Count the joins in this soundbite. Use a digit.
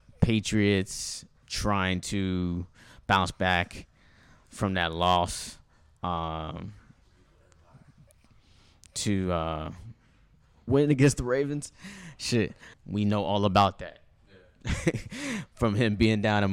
2